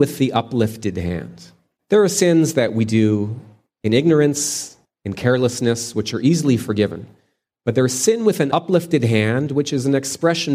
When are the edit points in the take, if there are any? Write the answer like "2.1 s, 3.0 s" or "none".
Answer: none